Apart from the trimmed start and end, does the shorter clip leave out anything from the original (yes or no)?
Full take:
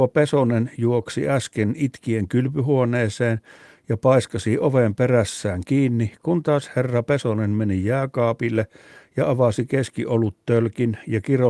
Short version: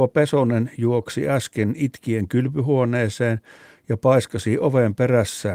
no